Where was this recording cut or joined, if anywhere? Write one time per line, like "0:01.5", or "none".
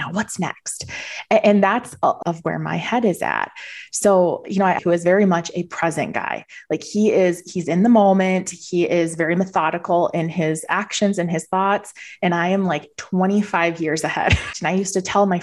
0:02.2
0:04.8
0:14.5